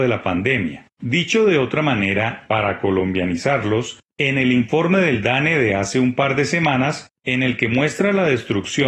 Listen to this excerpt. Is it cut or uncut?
cut